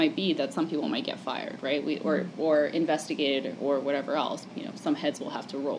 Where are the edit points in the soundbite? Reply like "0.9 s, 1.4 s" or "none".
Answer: 4.5 s